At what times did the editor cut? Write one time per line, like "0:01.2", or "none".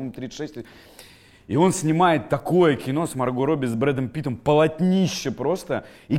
none